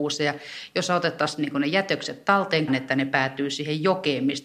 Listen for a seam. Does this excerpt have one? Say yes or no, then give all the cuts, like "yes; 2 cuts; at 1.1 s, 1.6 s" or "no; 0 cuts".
yes; 1 cut; at 2.7 s